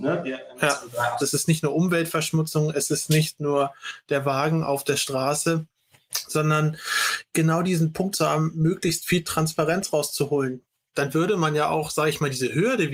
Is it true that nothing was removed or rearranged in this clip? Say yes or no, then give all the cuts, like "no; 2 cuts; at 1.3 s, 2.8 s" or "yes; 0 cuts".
no; 2 cuts; at 1.2 s, 8.1 s